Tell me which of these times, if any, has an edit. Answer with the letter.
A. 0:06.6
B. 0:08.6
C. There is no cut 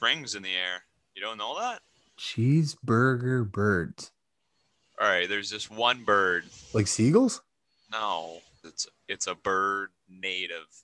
B